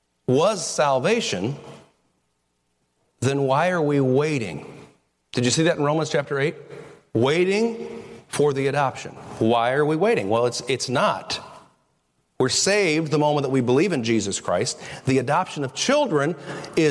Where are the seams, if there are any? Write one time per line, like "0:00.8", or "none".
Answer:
none